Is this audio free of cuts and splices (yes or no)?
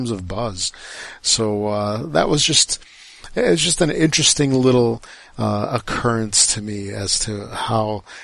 yes